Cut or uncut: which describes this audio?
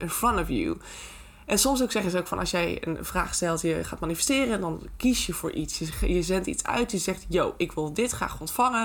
uncut